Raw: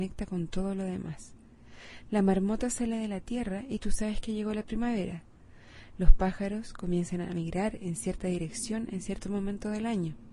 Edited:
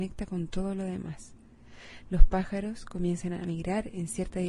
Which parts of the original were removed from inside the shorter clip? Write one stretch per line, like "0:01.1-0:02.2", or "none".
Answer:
0:02.0-0:05.9

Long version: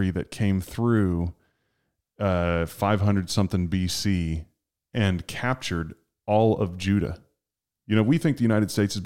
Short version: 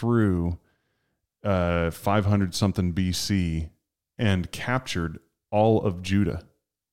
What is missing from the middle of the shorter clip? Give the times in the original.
none

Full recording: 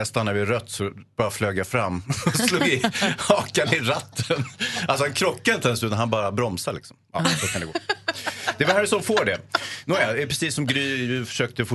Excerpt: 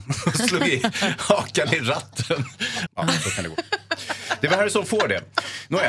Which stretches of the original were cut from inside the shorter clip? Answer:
0:04.9-0:07.0

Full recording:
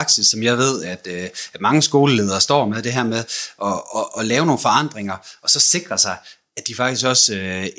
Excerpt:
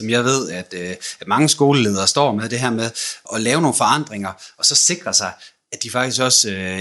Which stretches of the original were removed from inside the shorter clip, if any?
0:03.6-0:04.1

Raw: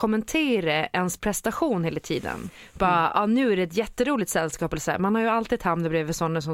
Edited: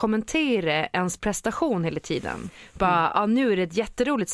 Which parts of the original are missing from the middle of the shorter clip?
none

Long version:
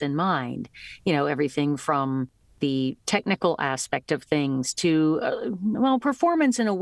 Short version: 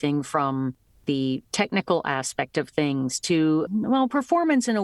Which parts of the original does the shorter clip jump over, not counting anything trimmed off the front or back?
0:05.2-0:05.6

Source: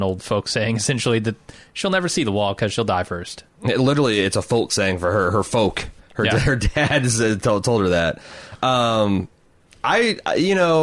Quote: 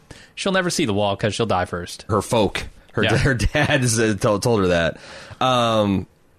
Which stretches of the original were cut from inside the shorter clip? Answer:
0:03.5-0:05.3

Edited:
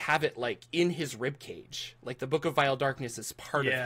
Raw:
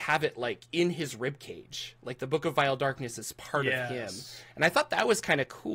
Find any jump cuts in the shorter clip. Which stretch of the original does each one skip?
none

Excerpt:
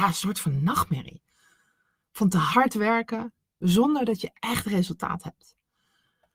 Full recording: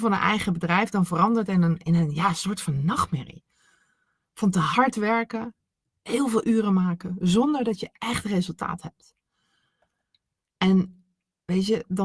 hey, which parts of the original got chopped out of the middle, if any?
0:05.8-0:07.2

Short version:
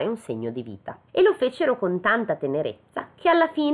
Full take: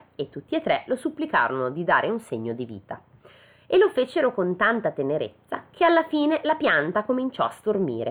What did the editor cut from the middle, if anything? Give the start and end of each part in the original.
0:03.1-0:03.6

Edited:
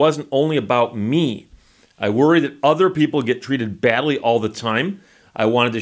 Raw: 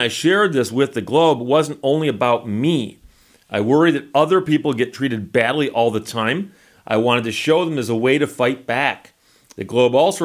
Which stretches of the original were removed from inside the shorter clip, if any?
none

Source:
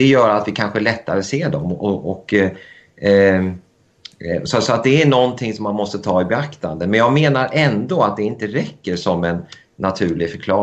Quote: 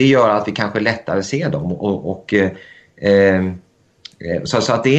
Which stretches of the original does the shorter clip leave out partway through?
none

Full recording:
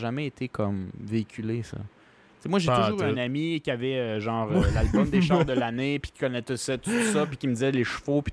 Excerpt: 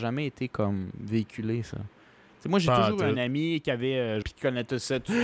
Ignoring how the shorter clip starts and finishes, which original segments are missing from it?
0:04.2-0:06.0

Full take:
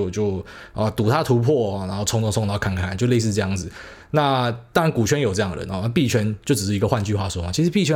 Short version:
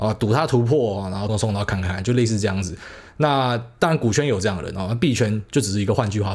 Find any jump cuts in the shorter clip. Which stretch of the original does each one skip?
0:02.1-0:02.2

